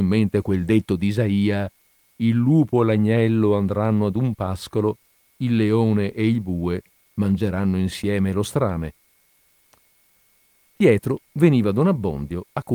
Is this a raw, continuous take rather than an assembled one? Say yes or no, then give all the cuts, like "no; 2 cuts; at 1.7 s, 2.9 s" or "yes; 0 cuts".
yes; 0 cuts